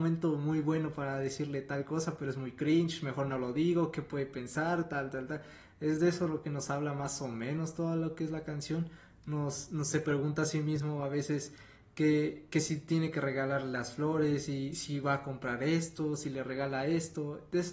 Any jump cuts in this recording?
no; 0 cuts

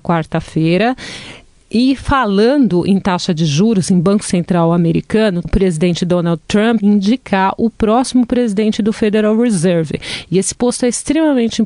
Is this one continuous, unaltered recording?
no; 2 cuts; at 5.4 s, 6.8 s

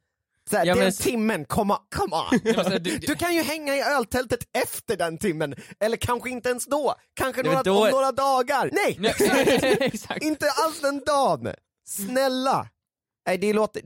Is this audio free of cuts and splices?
no; 1 cut; at 8.7 s

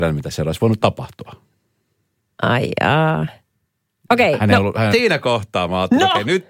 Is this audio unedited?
no; 1 cut; at 4.9 s

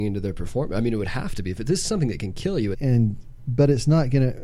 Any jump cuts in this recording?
yes; 1 cut; at 2.7 s

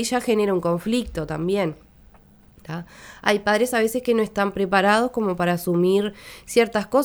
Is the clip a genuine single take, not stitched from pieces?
yes; 0 cuts

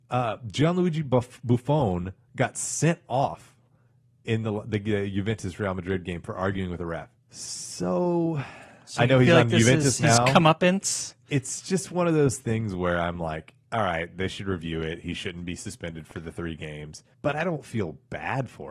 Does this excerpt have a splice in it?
yes; 3 cuts; at 7.1 s, 13.6 s, 17.1 s

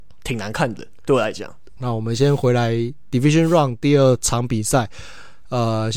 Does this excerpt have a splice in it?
yes; 1 cut; at 1.8 s

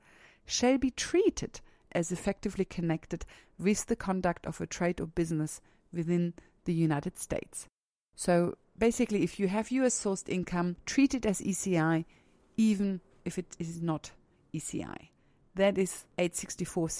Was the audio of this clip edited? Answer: no; 0 cuts

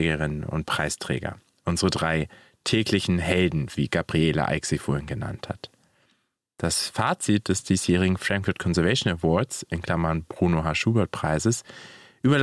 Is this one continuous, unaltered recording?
yes; 0 cuts

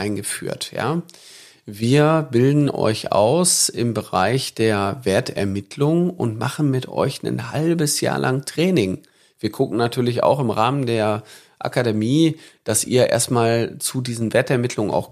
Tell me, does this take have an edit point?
yes; 1 cut; at 9.2 s

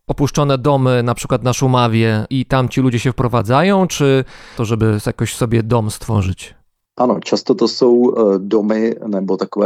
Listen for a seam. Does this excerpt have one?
yes; 1 cut; at 4.6 s

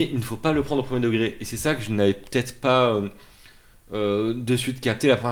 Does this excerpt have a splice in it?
no; 0 cuts

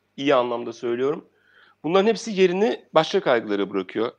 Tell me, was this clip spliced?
no; 0 cuts

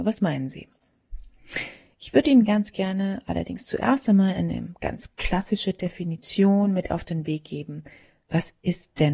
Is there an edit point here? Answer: no; 0 cuts

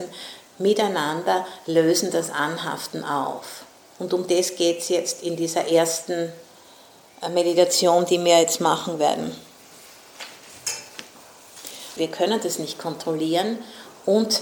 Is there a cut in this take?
yes; 2 cuts; at 3.9 s, 12.0 s

